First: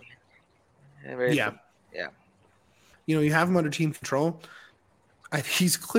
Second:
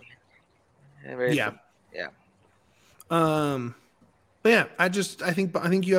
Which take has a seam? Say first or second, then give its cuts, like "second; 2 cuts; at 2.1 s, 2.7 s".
first; 1 cut; at 2.9 s